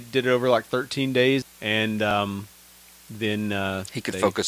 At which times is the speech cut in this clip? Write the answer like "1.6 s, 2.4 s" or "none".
1.4 s